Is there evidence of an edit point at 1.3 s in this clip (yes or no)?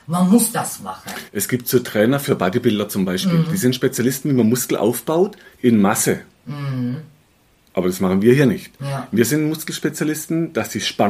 yes